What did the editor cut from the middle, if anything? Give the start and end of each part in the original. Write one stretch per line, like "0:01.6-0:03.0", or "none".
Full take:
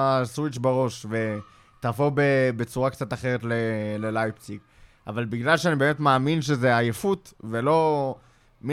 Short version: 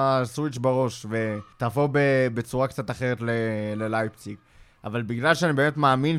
0:01.5-0:01.8